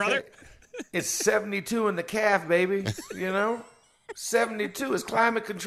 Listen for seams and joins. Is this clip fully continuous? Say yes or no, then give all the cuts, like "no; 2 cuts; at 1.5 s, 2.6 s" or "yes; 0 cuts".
yes; 0 cuts